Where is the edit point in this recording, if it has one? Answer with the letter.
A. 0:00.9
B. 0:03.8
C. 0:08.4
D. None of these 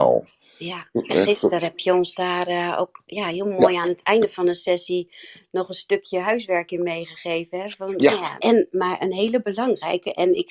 C